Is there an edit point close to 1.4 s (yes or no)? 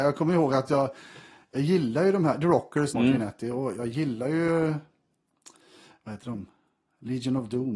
no